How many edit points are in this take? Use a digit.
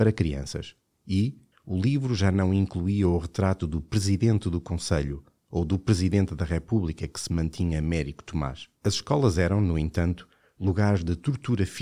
2